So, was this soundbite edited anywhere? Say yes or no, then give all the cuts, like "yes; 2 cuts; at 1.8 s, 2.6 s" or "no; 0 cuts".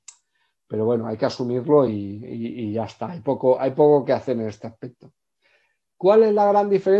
no; 0 cuts